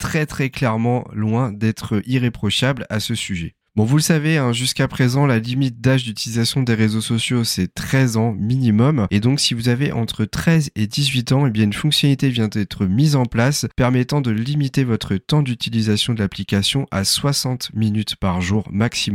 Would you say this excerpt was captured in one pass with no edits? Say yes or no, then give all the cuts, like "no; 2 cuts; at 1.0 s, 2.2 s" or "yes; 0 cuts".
yes; 0 cuts